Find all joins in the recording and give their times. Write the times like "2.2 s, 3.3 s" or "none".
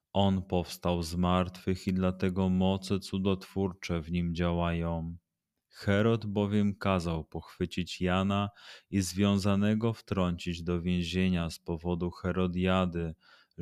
none